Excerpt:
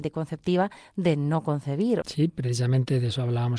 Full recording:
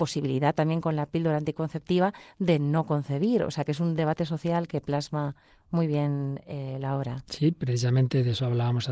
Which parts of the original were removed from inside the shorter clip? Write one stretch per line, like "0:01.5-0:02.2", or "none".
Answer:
0:03.4-0:07.2

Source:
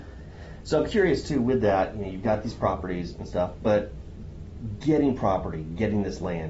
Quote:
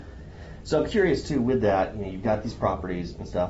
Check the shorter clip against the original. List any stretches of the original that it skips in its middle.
none

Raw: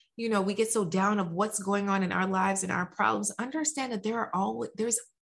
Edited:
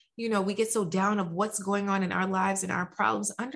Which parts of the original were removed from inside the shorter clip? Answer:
none

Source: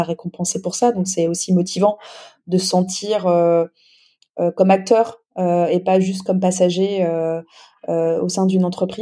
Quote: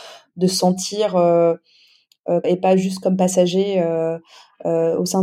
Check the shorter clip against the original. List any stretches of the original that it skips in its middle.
0:04.5-0:05.7

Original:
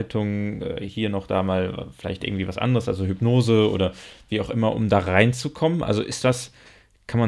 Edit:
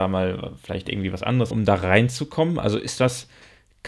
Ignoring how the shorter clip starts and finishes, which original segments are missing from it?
0:02.9-0:04.7

